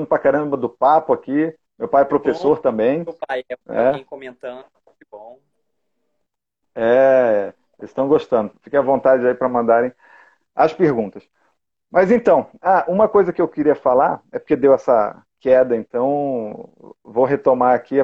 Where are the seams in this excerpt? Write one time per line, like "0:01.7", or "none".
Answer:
none